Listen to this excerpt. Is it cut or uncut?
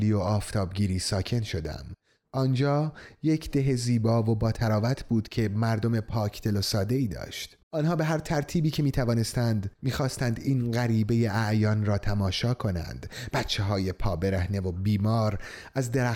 cut